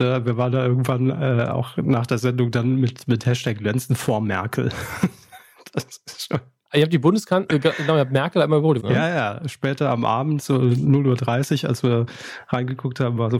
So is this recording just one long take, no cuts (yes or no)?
no